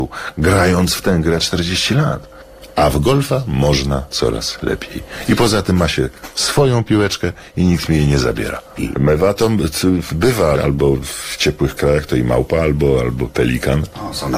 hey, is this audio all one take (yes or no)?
no